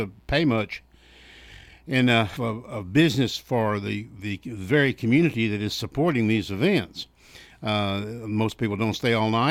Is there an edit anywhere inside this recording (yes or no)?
yes